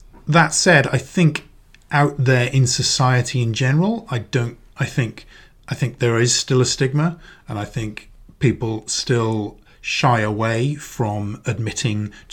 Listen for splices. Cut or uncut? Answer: uncut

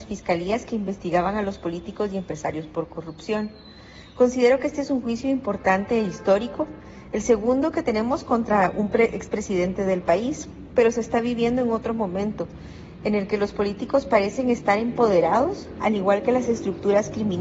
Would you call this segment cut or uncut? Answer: uncut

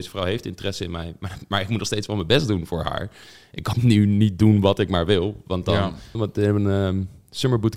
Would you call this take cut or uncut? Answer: cut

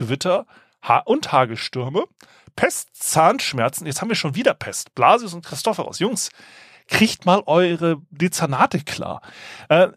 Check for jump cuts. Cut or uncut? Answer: uncut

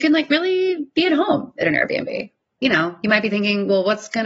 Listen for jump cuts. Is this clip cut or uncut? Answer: cut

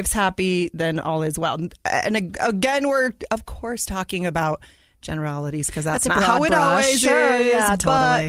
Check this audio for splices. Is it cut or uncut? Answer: uncut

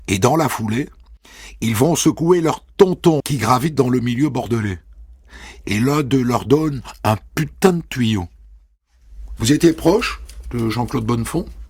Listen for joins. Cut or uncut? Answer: cut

